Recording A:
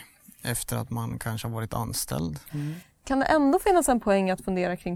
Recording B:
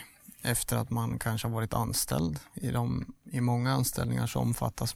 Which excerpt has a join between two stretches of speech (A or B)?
A